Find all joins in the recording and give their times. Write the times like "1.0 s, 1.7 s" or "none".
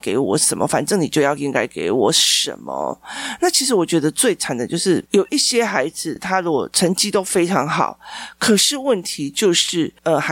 none